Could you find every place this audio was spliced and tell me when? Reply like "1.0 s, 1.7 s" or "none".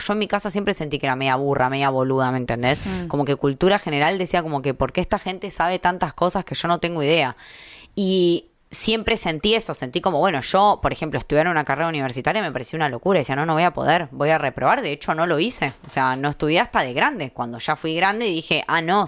none